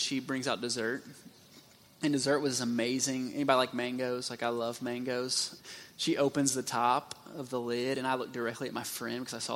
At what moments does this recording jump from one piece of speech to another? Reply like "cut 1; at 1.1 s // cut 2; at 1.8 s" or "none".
cut 1; at 5.6 s